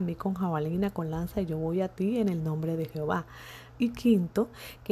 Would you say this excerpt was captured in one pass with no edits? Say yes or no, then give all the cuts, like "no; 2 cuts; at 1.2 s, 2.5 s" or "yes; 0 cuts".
no; 1 cut; at 3.8 s